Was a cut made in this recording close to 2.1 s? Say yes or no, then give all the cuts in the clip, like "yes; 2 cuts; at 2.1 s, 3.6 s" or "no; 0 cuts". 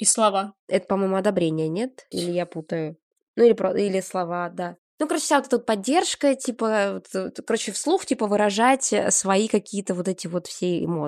yes; 1 cut; at 2.1 s